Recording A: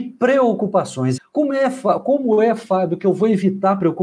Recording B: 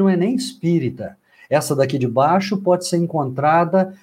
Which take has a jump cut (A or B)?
A